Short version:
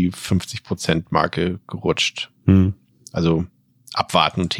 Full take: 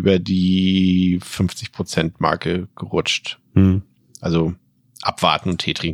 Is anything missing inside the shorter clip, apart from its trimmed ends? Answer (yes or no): no